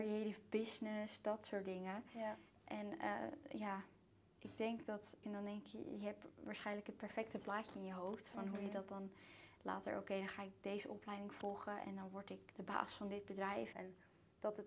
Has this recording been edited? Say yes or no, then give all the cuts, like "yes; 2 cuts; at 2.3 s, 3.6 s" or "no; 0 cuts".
yes; 3 cuts; at 5.2 s, 12.5 s, 13.7 s